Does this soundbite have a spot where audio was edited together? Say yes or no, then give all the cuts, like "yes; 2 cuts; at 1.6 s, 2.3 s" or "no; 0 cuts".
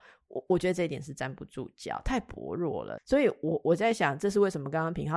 yes; 1 cut; at 3.0 s